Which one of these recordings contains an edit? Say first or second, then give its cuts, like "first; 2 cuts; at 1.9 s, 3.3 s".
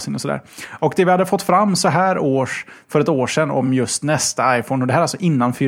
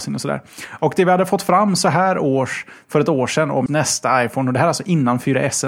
second; 1 cut; at 3.7 s